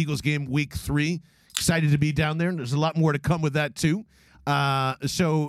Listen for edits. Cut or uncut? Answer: uncut